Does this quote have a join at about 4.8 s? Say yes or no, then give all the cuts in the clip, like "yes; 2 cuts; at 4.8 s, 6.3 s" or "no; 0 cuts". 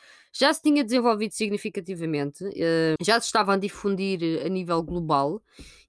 no; 1 cut; at 3.0 s